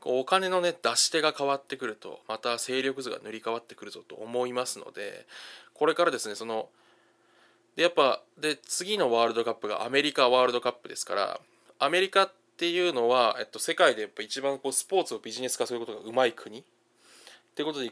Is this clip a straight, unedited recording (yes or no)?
no